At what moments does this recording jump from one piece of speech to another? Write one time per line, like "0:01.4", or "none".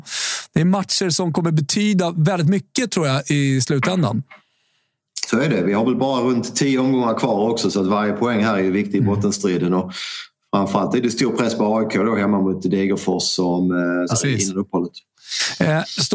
0:14.1